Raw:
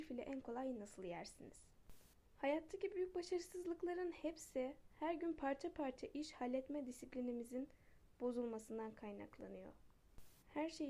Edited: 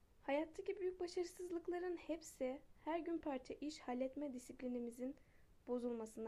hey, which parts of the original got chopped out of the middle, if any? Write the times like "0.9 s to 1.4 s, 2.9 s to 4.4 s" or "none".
5.4 s to 5.7 s